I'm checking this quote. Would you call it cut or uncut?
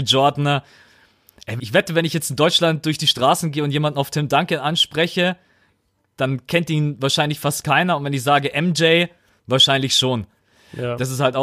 cut